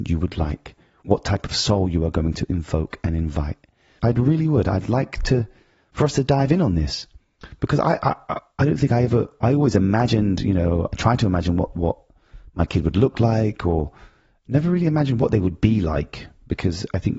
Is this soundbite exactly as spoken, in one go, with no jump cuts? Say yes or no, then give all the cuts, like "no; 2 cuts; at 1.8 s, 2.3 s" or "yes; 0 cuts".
no; 1 cut; at 4.0 s